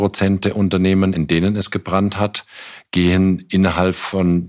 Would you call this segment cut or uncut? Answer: uncut